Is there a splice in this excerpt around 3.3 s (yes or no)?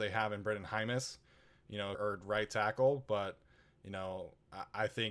no